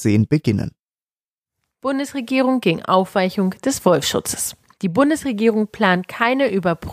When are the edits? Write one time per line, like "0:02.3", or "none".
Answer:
none